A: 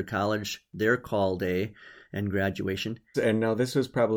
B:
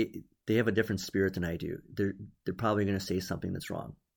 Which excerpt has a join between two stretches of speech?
A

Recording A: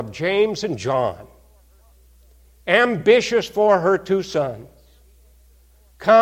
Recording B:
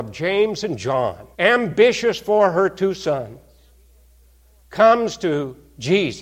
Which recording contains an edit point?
B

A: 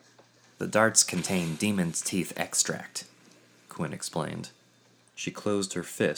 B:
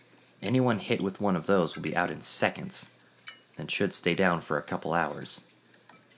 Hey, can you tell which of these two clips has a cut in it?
A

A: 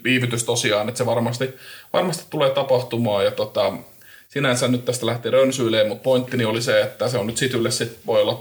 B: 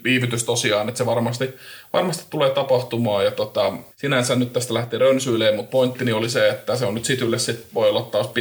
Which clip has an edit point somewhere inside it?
B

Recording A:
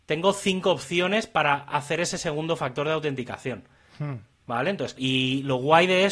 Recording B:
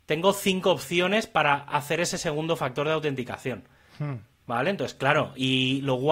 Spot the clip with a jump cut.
A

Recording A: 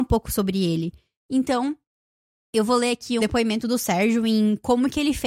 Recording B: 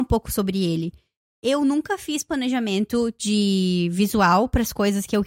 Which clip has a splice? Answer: A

